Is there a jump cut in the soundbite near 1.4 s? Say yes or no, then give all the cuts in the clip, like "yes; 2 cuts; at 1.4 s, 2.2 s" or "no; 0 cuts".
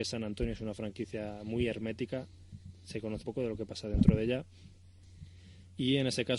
no; 1 cut; at 3.2 s